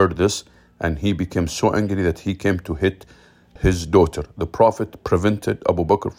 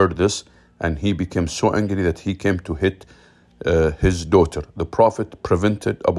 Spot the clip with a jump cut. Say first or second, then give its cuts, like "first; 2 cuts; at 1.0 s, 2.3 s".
first; 1 cut; at 3.6 s